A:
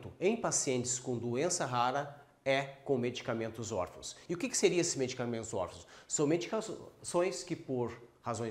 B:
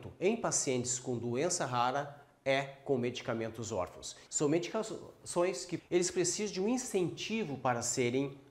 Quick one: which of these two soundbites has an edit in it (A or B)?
B